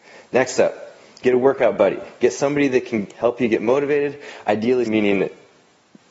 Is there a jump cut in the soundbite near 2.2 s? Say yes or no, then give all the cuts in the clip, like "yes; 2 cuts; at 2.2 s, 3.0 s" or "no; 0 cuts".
no; 1 cut; at 4.9 s